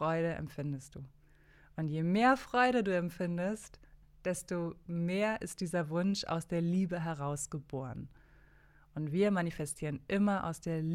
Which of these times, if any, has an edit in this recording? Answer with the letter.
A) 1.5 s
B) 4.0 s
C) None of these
B